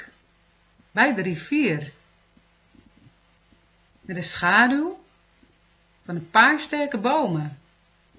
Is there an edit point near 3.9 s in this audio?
no; 0 cuts

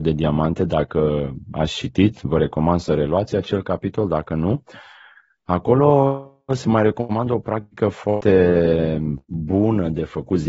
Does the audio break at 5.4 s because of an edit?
no; 0 cuts

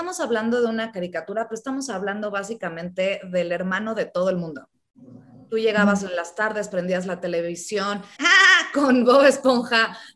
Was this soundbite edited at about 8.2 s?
yes; 1 cut; at 8.2 s

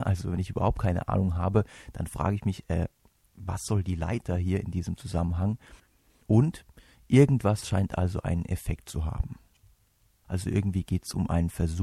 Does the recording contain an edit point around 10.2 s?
yes; 1 cut; at 10.2 s

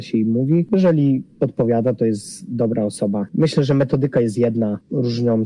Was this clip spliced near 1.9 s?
yes; 1 cut; at 1.9 s

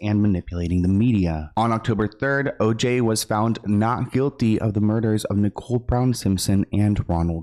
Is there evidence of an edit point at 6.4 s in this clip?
no; 1 cut; at 1.5 s

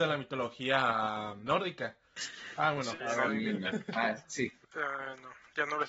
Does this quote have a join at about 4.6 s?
yes; 2 cuts; at 2.2 s, 4.6 s

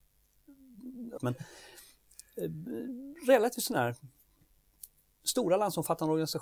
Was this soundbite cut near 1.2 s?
yes; 1 cut; at 1.2 s

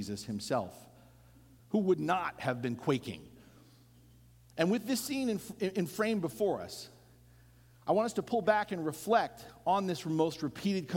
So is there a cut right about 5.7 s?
no; 1 cut; at 1.6 s

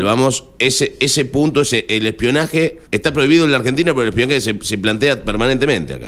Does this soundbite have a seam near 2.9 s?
yes; 1 cut; at 2.9 s

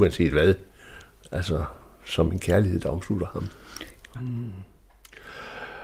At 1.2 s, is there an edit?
no; 1 cut; at 4.1 s

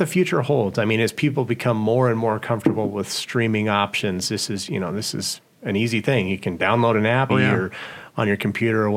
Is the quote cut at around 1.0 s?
no; 1 cut; at 7.3 s

